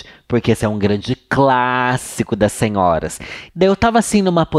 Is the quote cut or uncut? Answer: cut